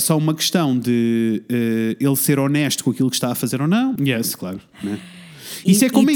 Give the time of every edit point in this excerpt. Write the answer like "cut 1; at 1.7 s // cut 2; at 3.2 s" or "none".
cut 1; at 4.0 s